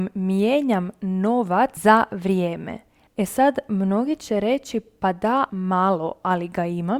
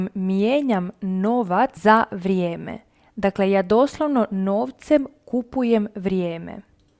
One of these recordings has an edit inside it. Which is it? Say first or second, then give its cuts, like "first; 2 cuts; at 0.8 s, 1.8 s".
first; 2 cuts; at 3.1 s, 5.5 s